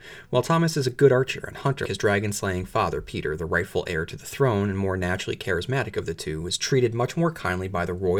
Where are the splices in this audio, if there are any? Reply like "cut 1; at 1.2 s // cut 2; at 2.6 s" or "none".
cut 1; at 1.9 s